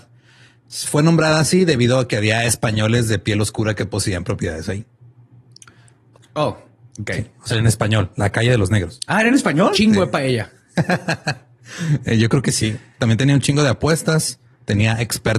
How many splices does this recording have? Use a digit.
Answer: 3